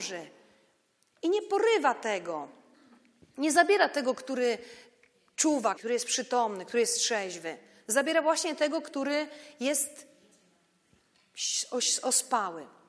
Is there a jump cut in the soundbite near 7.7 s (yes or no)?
no